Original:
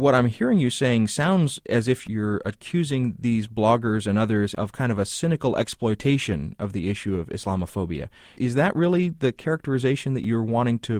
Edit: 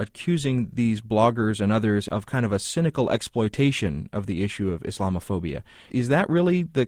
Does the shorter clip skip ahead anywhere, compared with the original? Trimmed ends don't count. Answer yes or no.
no